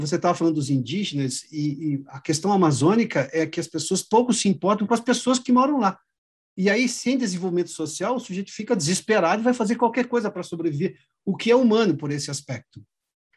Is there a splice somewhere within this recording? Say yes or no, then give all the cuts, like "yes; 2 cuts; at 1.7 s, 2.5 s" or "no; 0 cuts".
no; 0 cuts